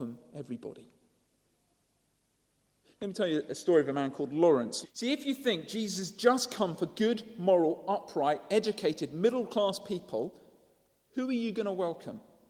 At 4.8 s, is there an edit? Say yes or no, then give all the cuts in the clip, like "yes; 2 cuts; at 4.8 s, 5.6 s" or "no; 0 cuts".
yes; 1 cut; at 4.8 s